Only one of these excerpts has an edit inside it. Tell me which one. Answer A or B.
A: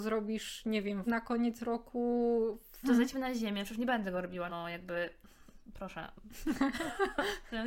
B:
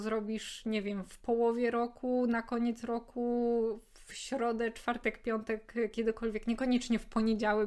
A